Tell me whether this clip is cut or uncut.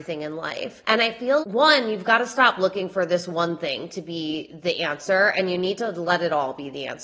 cut